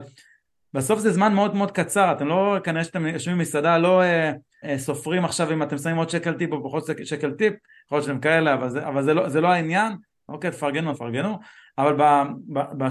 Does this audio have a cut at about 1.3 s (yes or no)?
no